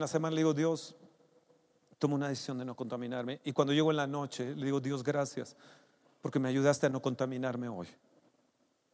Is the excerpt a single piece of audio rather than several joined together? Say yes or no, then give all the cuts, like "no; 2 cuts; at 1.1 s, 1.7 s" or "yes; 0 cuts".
yes; 0 cuts